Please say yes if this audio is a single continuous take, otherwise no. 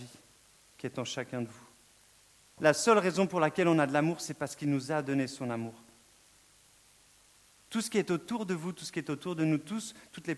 no